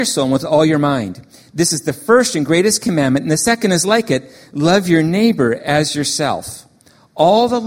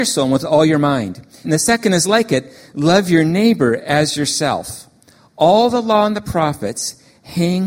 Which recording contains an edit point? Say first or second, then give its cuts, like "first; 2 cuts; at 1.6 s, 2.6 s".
second; 1 cut; at 1.4 s